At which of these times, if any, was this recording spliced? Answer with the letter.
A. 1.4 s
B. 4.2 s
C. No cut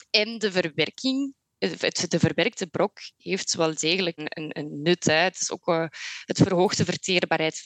B